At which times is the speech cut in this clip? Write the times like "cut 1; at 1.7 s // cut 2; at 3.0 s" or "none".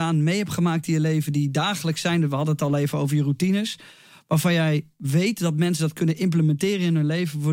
none